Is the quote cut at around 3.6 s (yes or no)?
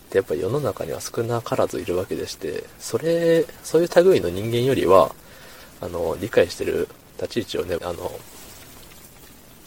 no